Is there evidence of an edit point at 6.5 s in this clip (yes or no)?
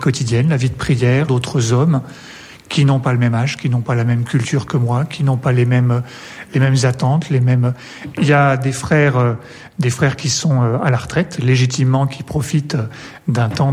no